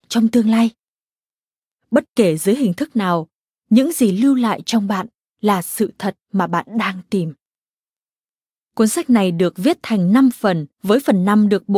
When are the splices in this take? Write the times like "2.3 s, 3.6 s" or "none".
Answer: 10.7 s

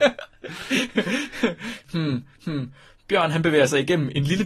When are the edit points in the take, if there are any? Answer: 1.8 s

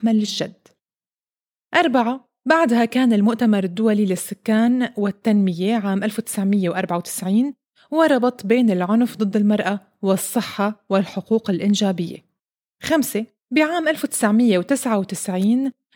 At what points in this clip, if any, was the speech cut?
none

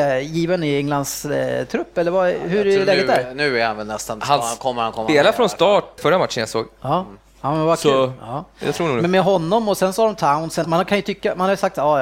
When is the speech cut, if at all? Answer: 6.0 s, 10.6 s

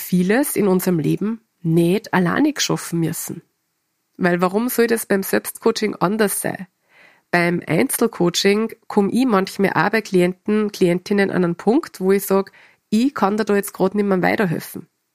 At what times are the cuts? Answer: 4.1 s

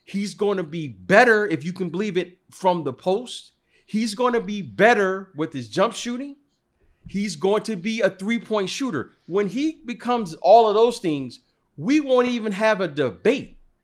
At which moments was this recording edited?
none

